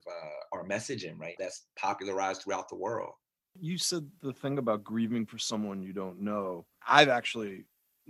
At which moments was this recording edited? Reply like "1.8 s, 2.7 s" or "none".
1.4 s, 6.8 s